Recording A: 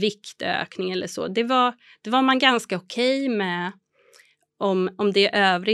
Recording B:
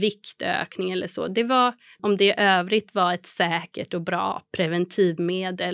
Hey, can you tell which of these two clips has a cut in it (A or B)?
B